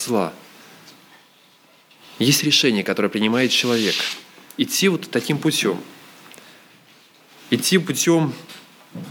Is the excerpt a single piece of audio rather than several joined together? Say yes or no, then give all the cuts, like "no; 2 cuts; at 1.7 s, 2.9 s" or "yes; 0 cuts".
yes; 0 cuts